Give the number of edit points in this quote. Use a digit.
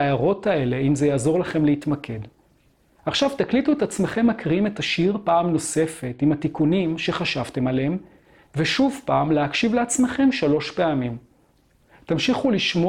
0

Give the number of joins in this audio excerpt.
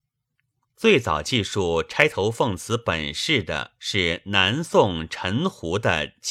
1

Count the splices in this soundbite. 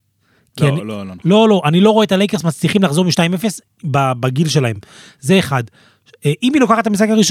0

